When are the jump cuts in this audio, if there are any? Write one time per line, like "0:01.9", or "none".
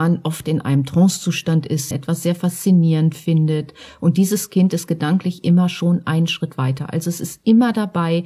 0:01.9

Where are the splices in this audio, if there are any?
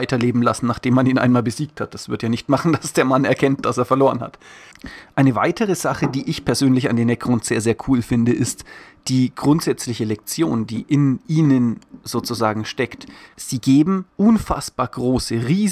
0:13.3

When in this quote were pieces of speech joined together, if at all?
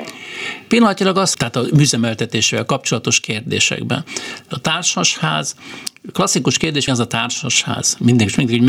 0:01.3
0:04.5
0:06.9

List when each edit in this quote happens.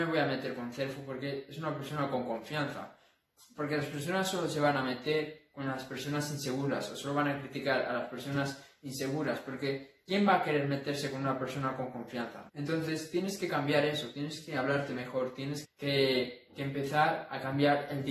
0:12.5
0:15.6

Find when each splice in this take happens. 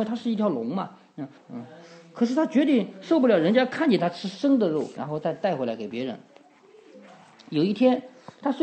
0:01.4
0:05.0

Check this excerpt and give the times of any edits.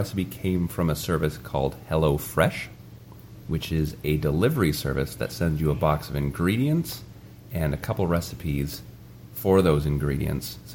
none

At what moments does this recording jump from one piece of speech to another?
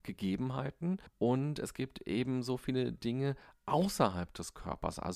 0:01.1

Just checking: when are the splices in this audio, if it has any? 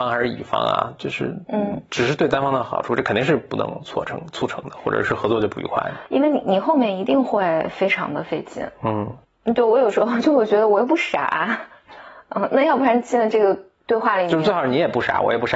none

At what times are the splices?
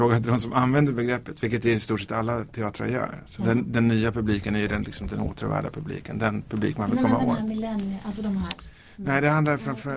none

